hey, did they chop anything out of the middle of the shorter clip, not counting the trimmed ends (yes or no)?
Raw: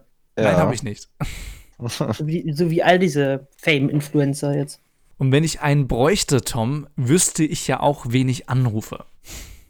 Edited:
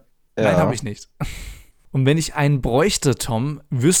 yes